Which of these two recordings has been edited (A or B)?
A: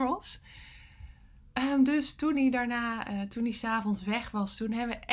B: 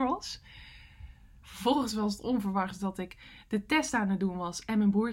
B